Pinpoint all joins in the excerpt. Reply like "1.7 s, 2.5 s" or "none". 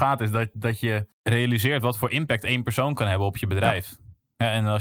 1.1 s